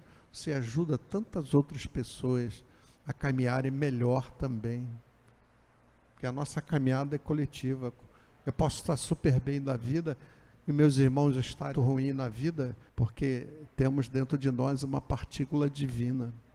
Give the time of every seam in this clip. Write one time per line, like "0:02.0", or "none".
0:11.7
0:12.9